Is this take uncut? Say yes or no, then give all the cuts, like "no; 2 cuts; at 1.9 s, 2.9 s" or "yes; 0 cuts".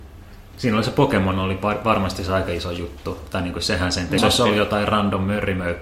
no; 1 cut; at 4.2 s